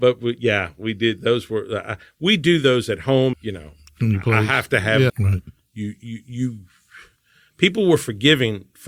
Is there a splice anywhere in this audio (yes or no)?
yes